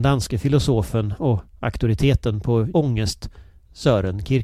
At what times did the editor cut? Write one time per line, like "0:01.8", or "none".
0:02.7